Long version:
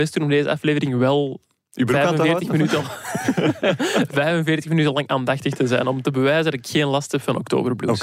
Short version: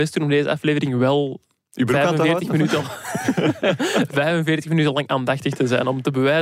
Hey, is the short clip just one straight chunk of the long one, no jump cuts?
yes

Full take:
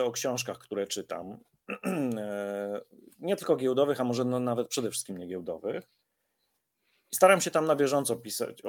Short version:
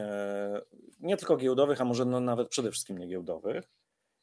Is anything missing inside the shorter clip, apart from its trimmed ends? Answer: no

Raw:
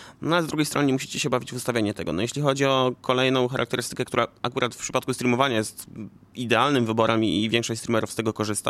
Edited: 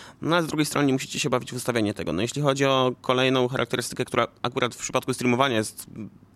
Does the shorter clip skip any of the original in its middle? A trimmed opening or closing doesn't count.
no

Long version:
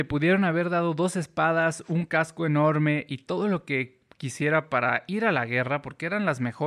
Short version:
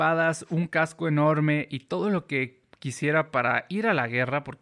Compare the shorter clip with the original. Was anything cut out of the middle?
no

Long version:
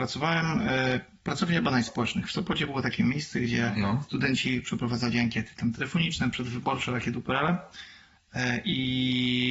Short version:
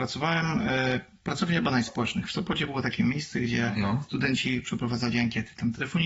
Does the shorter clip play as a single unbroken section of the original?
yes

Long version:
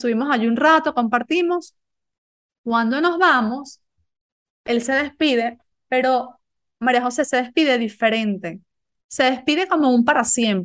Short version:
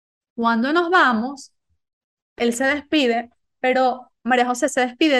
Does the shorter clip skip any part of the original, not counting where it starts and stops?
yes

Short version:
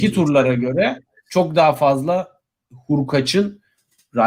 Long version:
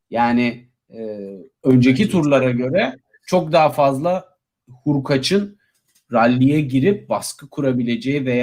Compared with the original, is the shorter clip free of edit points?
yes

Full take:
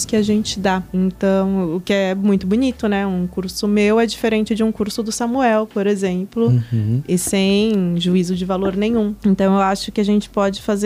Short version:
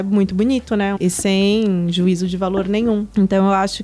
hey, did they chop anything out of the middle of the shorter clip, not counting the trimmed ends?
yes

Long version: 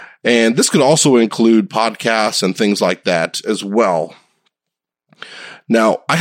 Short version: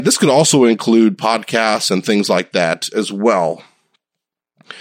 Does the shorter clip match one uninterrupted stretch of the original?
yes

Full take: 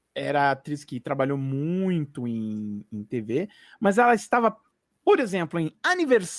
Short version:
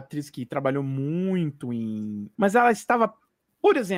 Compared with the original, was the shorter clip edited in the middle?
yes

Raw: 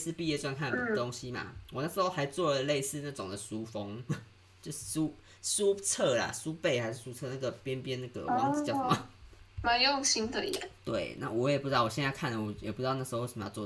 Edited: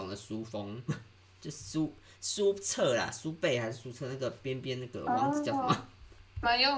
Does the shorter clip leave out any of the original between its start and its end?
no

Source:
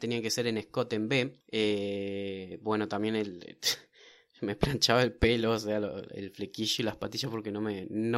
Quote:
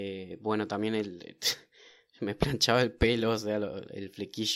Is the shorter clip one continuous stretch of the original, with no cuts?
yes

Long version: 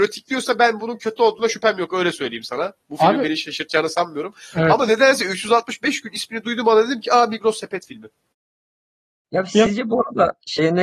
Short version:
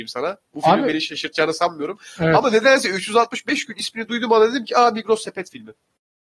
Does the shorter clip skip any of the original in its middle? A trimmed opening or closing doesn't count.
no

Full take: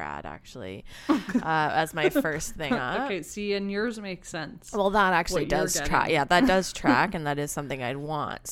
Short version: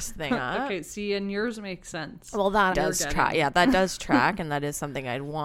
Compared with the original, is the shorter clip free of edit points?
no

